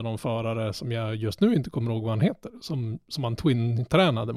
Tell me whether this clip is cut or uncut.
uncut